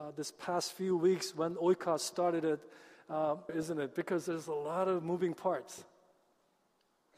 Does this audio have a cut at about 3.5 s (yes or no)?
yes